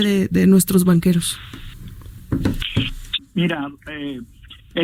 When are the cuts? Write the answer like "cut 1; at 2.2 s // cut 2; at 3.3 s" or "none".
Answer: cut 1; at 3.2 s